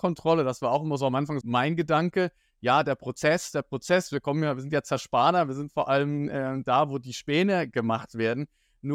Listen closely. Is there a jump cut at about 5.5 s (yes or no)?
no